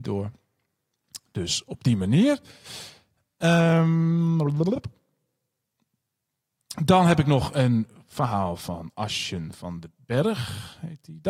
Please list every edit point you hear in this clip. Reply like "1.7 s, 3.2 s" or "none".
none